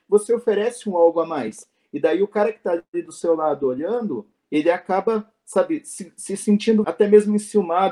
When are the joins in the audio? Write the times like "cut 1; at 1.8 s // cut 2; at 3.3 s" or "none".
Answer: cut 1; at 6.8 s